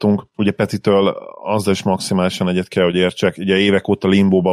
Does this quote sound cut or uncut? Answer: uncut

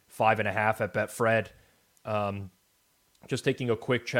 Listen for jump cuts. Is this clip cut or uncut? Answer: cut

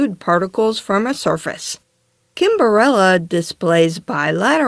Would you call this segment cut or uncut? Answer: uncut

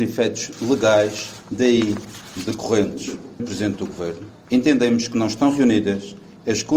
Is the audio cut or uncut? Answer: cut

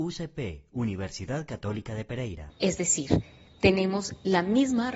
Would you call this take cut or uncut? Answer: cut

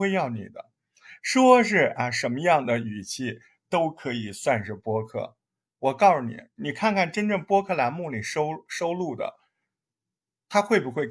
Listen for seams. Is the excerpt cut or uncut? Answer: uncut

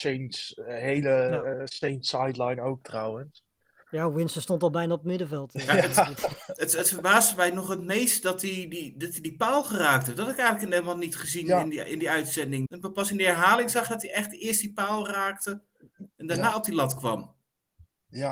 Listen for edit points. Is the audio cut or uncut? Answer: cut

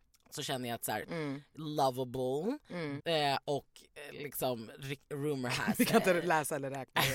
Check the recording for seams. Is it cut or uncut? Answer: cut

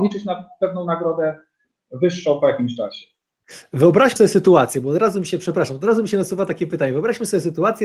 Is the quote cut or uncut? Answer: uncut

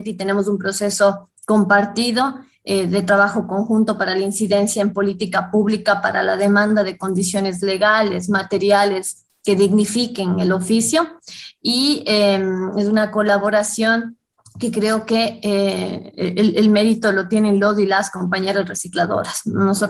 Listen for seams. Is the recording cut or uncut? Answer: uncut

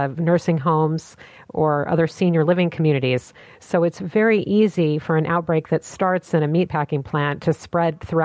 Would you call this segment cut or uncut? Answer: uncut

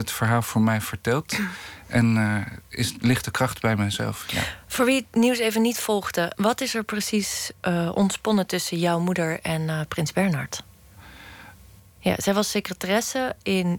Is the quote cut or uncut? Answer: cut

